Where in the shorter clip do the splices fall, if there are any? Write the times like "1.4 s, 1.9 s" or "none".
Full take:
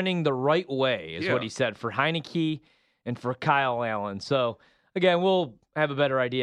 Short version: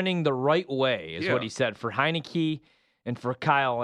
none